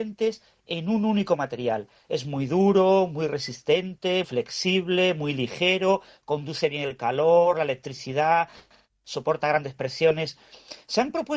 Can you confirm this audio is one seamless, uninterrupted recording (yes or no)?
no